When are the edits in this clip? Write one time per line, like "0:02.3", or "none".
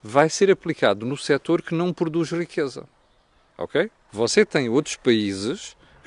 0:04.1